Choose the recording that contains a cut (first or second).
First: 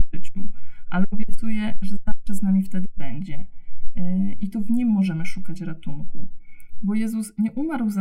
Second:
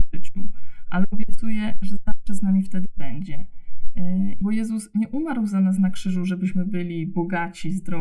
second